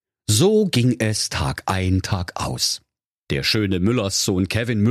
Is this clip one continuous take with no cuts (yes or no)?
no